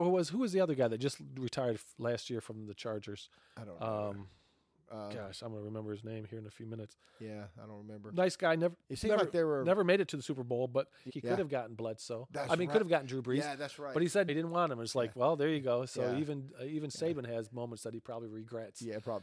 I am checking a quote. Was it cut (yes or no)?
yes